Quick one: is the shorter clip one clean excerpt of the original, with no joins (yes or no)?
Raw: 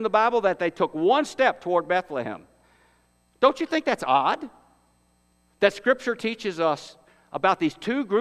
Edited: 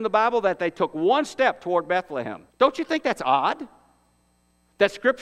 no